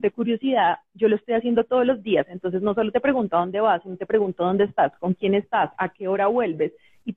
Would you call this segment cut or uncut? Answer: uncut